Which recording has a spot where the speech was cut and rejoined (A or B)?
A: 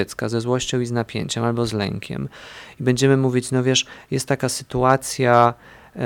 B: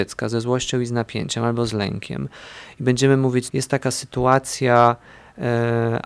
B